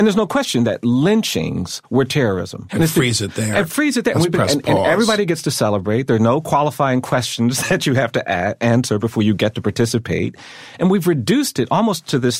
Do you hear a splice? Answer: yes; 1 cut; at 2.7 s

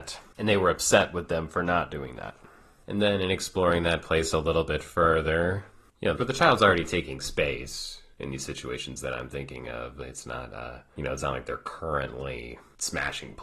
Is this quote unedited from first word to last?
no; 1 cut; at 6.2 s

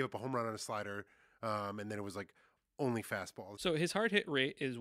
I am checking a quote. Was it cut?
yes; 1 cut; at 3.6 s

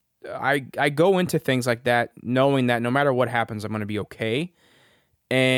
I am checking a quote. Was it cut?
no; 0 cuts

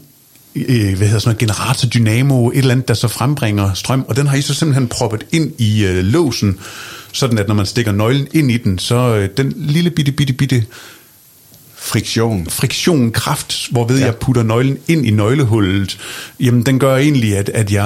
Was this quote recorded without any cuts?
yes; 0 cuts

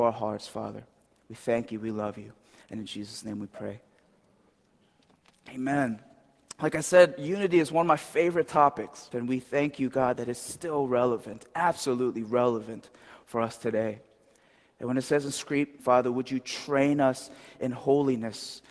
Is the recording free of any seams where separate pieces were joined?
no; 2 cuts; at 9.1 s, 15.8 s

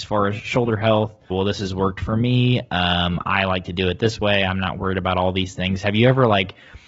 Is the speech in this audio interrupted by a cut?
yes; 1 cut; at 1.3 s

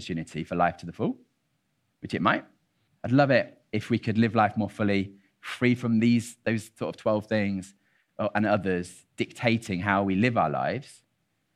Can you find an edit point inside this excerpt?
yes; 1 cut; at 2.9 s

